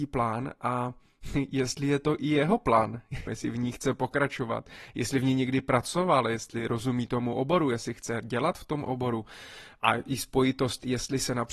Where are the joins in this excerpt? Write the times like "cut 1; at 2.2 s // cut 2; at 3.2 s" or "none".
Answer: cut 1; at 3.3 s